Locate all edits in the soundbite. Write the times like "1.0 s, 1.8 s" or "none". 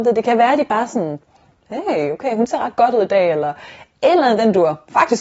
none